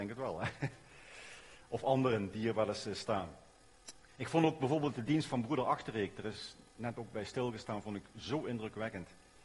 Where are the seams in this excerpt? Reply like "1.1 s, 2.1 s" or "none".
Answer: none

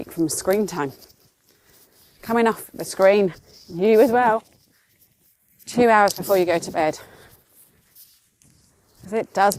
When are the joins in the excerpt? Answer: none

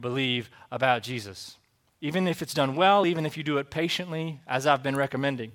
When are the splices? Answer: none

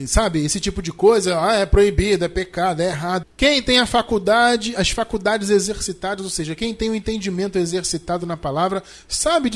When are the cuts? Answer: 3.2 s

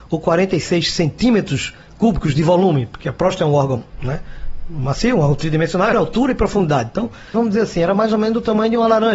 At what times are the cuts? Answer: 5.9 s, 7.3 s

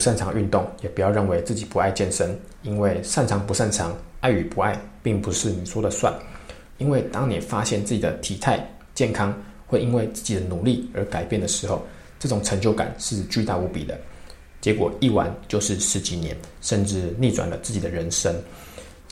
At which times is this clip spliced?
6.7 s, 14.6 s

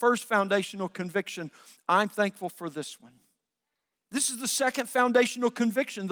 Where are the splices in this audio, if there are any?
3.9 s

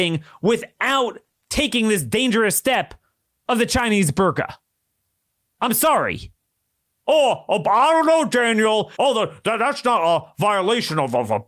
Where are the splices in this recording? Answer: 9.0 s

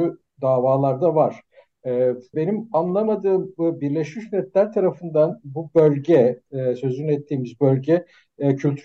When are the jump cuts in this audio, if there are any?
2.3 s

